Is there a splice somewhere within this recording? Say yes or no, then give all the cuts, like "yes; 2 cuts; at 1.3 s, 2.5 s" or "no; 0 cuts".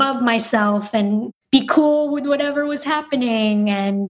no; 0 cuts